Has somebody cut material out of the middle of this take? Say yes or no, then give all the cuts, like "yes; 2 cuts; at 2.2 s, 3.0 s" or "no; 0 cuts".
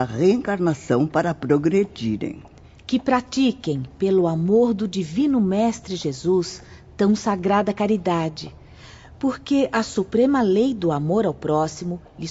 no; 0 cuts